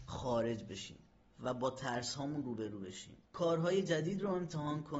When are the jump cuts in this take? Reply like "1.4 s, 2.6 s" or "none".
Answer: 3.2 s